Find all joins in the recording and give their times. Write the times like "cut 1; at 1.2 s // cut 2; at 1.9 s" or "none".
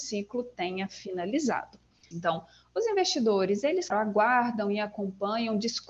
cut 1; at 2.1 s // cut 2; at 3.9 s